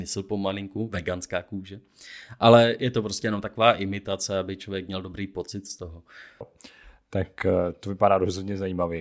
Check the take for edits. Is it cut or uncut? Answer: cut